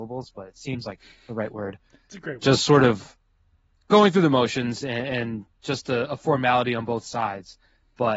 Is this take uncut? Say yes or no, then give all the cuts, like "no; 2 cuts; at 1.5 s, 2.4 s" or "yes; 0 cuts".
yes; 0 cuts